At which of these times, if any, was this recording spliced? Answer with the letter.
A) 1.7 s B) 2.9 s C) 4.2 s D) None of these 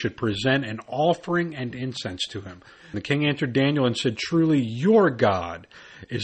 B